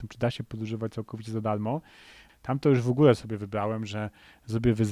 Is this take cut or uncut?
cut